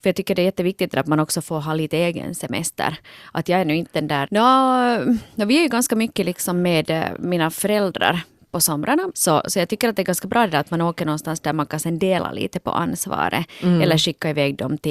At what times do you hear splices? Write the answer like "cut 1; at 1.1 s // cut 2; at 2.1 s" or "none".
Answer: cut 1; at 4.3 s // cut 2; at 9.1 s